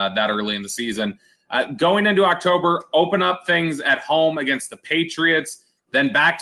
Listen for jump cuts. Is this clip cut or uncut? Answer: uncut